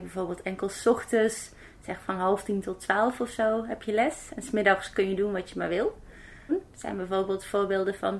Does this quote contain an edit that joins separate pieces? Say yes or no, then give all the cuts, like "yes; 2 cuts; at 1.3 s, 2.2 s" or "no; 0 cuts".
yes; 1 cut; at 6.5 s